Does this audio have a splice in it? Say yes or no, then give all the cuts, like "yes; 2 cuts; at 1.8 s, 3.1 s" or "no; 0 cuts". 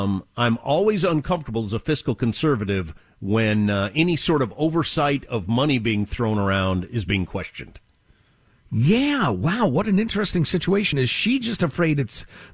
no; 0 cuts